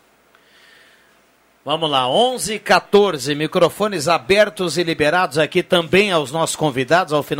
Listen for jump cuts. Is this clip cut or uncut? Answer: uncut